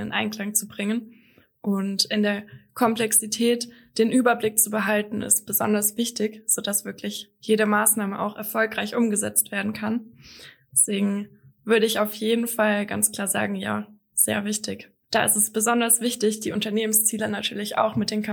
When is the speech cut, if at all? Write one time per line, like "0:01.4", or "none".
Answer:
0:15.0